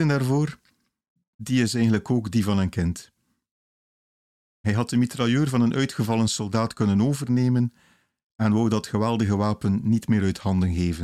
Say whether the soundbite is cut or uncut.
cut